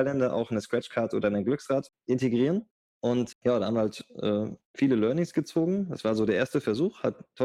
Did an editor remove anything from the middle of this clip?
no; 0 cuts

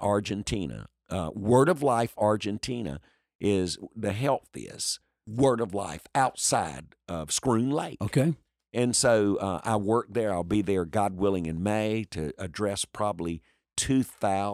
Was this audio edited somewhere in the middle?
no; 0 cuts

